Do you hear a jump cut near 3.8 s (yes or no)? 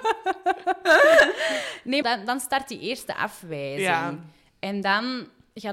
no